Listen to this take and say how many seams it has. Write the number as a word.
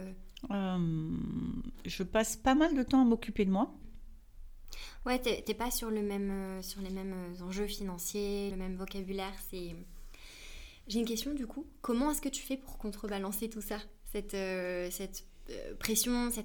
two